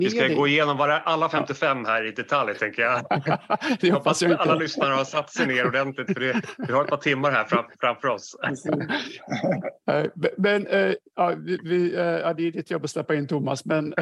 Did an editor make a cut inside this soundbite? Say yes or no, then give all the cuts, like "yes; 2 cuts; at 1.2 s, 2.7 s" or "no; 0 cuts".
no; 0 cuts